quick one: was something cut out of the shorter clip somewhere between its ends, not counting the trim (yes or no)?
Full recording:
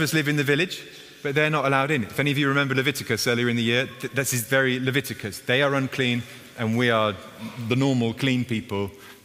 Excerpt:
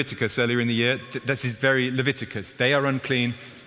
no